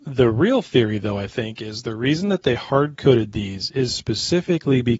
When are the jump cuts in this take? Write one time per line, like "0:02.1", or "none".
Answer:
none